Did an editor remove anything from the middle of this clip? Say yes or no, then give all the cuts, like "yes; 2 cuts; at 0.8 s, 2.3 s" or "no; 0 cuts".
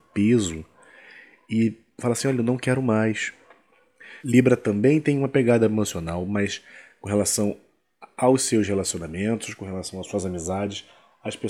yes; 1 cut; at 4.2 s